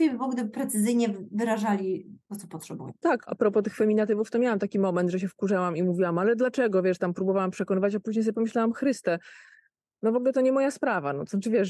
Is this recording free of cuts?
yes; 0 cuts

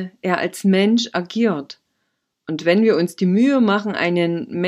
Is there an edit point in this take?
no; 0 cuts

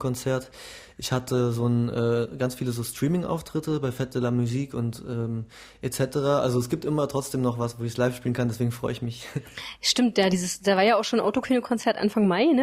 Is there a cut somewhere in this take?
no; 0 cuts

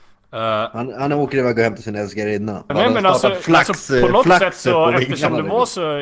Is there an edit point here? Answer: yes; 1 cut; at 2.7 s

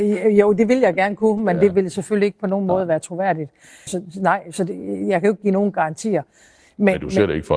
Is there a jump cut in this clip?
yes; 1 cut; at 3.9 s

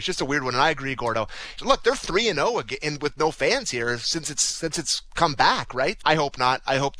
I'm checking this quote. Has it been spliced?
yes; 2 cuts; at 1.6 s, 6.0 s

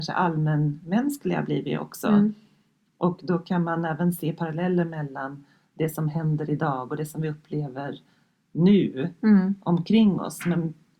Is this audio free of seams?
yes; 0 cuts

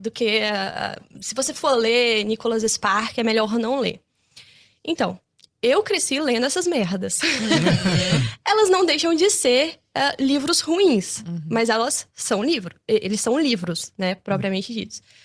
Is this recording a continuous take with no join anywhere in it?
yes; 0 cuts

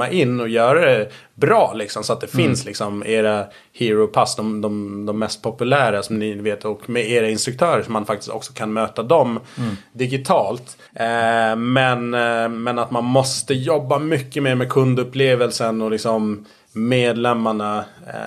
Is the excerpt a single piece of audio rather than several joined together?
no; 1 cut; at 10.9 s

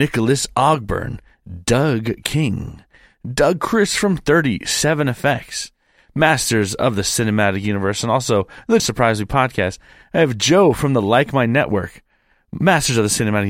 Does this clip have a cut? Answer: yes; 1 cut; at 8.8 s

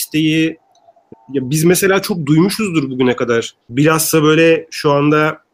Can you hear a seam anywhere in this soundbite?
yes; 2 cuts; at 1.1 s, 3.6 s

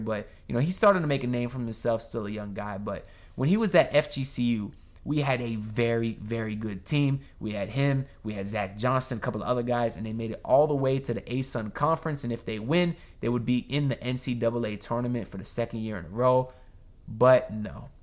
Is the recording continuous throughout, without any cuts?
yes; 0 cuts

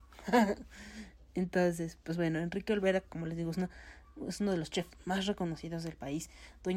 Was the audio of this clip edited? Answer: no; 0 cuts

